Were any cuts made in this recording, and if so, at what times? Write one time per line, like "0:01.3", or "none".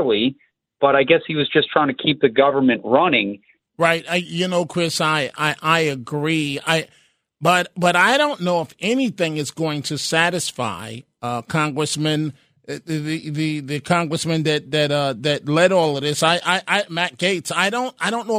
0:03.7

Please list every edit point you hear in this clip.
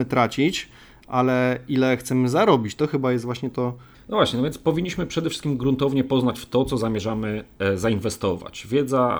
0:03.9

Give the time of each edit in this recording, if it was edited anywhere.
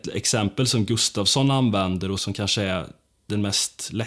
0:02.2

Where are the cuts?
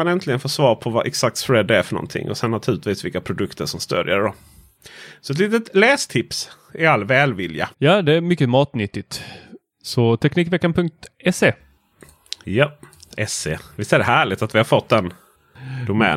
0:07.7

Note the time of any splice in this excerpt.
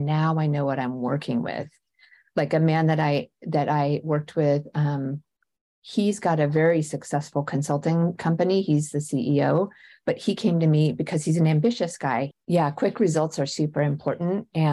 0:12.3

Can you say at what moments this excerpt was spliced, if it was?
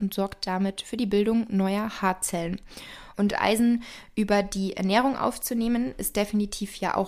0:03.1

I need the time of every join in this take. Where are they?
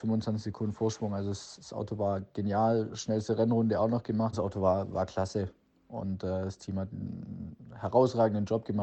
0:04.3

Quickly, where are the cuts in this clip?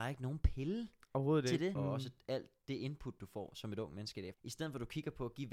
0:01.7
0:04.3

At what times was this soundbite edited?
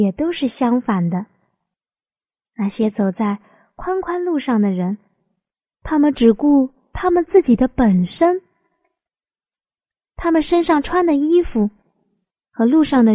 none

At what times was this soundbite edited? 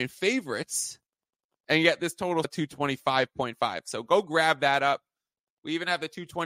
0:02.4

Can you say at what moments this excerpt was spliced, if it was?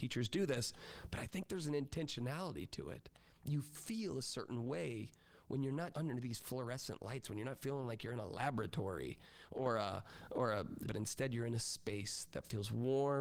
0:05.9
0:10.8

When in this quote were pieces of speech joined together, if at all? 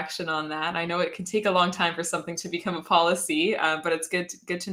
none

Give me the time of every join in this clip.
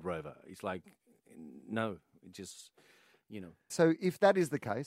0:03.7

